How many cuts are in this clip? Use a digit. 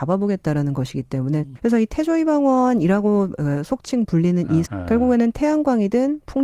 2